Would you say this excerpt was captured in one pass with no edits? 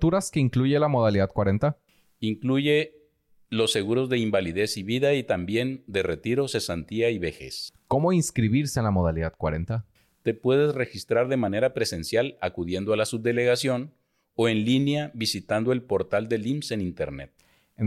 yes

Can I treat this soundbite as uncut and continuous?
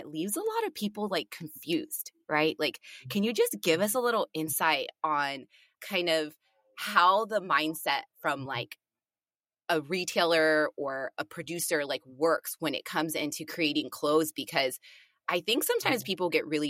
yes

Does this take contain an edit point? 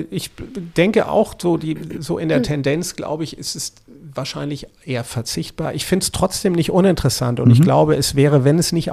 no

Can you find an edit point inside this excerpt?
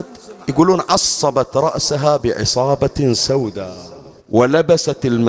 yes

